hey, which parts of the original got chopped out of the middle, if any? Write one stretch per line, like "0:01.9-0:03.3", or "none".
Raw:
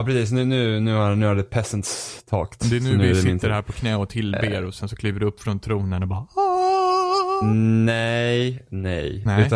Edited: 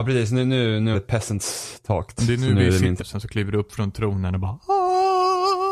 0:00.9-0:01.4
0:03.4-0:04.7